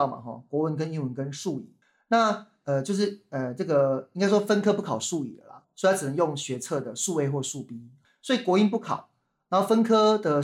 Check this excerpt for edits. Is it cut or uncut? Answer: uncut